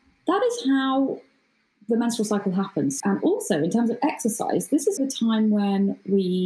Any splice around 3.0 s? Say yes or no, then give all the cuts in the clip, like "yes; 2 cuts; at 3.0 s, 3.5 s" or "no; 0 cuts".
yes; 2 cuts; at 3.0 s, 5.0 s